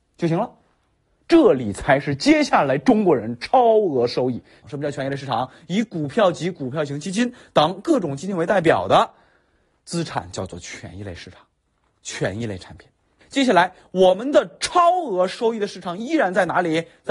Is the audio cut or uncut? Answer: cut